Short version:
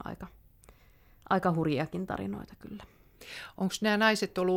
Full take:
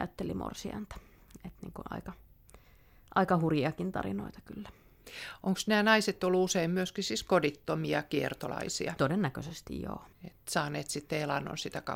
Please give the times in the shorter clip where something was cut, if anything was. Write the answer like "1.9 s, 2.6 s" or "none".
none